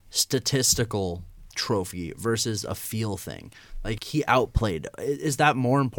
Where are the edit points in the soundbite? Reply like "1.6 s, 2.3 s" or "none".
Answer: 4.0 s